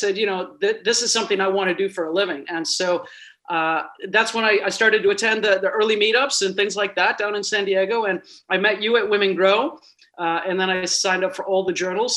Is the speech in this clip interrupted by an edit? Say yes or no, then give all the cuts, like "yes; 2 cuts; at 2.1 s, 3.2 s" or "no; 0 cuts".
yes; 1 cut; at 10.0 s